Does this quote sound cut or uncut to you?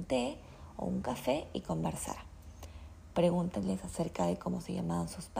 uncut